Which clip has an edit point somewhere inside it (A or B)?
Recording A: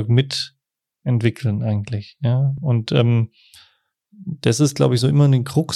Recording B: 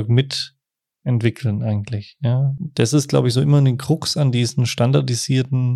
B